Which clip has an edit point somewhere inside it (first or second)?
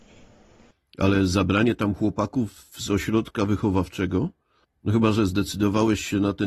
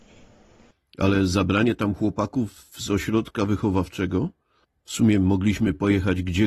second